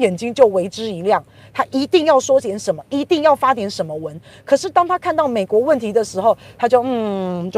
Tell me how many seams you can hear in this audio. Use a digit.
0